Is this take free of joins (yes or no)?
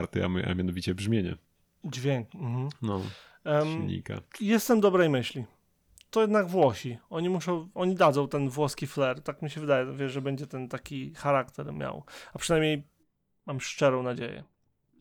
no